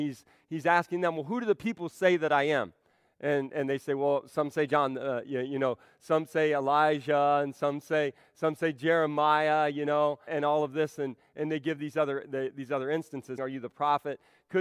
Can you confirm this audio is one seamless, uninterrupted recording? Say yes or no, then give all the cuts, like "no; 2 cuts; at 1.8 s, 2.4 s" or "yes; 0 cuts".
no; 2 cuts; at 10.3 s, 13.4 s